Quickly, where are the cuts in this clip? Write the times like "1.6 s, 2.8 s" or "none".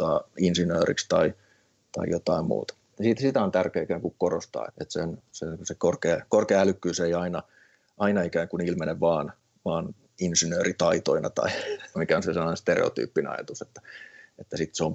2.9 s, 4.7 s, 11.9 s